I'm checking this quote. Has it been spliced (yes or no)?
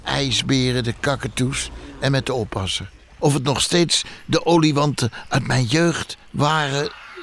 yes